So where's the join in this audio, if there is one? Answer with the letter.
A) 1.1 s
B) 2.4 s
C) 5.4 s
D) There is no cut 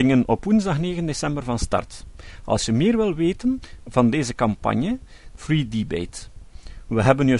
C